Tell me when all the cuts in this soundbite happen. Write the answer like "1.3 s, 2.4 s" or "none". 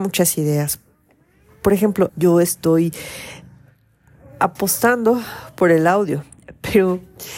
2.1 s